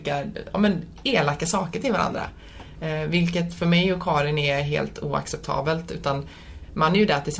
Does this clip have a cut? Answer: no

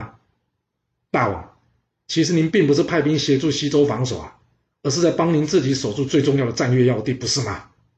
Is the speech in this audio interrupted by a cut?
no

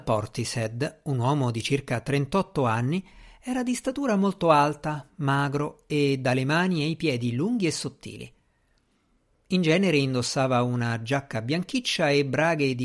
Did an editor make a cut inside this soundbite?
no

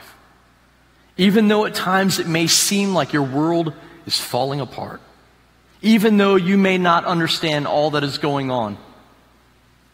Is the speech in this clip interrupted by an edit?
no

